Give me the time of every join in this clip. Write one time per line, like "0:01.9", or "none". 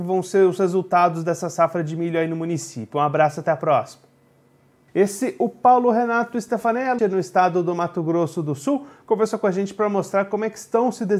0:04.9
0:07.0